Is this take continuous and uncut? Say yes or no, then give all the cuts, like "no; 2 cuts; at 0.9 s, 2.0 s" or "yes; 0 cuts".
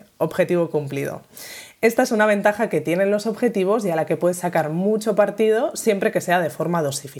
yes; 0 cuts